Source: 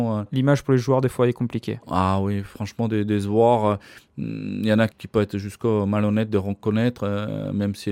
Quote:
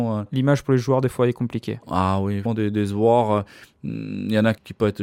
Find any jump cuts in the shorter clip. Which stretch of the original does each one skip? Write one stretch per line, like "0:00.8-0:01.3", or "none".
0:02.4-0:02.8